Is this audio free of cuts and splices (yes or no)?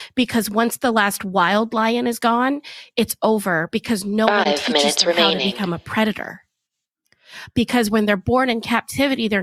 yes